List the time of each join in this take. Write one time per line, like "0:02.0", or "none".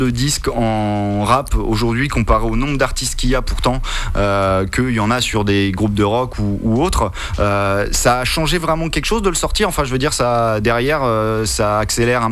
none

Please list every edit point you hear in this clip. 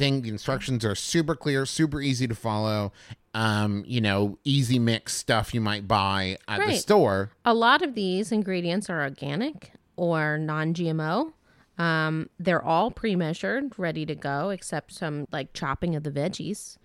0:03.2
0:15.2

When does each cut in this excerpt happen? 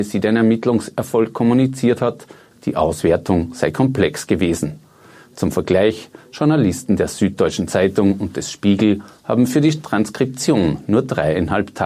0:02.5

